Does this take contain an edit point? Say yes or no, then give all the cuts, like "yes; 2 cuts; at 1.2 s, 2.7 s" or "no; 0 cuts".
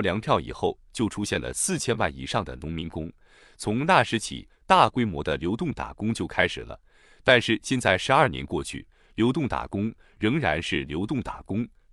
no; 0 cuts